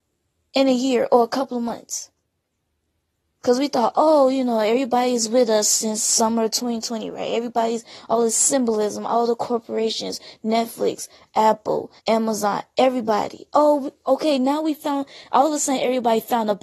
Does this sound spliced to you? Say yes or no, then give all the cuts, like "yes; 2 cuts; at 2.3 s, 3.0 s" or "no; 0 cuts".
yes; 1 cut; at 12.0 s